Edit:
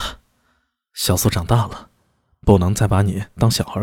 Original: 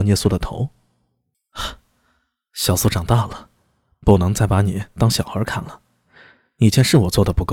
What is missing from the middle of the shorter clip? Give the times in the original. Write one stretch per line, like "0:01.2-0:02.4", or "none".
none